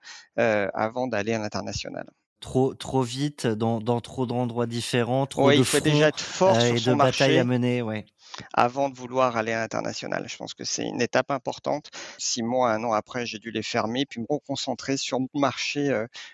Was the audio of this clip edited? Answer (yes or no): yes